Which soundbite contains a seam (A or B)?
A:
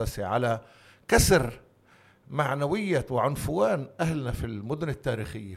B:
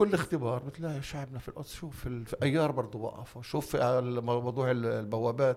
B